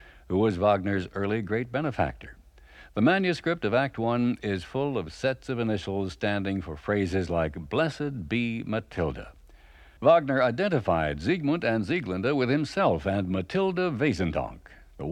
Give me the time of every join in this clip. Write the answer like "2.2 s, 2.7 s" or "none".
10.0 s